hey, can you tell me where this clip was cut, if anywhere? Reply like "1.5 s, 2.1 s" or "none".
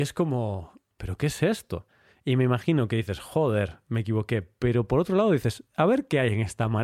none